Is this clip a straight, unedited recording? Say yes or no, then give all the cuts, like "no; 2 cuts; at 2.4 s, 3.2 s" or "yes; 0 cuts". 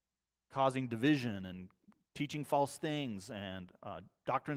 yes; 0 cuts